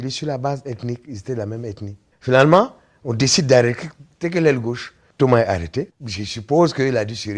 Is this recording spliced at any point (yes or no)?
yes